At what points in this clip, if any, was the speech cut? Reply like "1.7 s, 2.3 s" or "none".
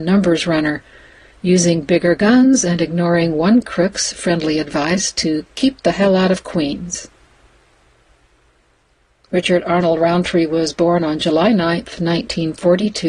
9.2 s